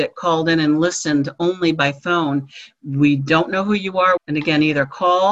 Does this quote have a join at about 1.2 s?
no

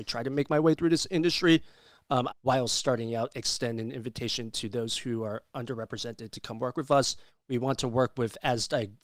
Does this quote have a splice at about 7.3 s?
yes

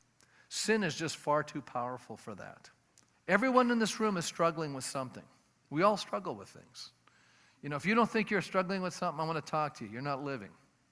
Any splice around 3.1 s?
yes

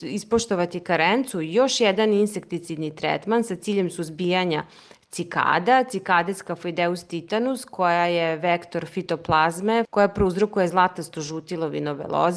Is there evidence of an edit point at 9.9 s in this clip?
yes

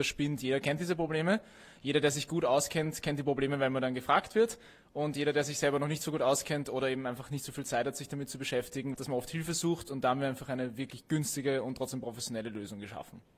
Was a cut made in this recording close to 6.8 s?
no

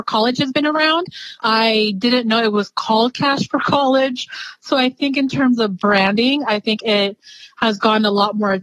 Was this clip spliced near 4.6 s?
no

